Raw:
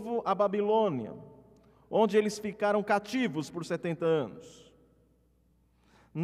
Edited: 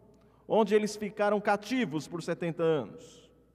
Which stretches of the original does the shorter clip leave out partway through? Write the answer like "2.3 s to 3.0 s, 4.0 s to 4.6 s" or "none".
none